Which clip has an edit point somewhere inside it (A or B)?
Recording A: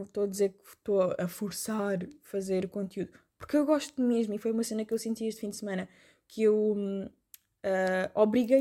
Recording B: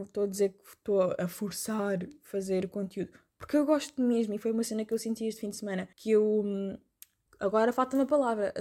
B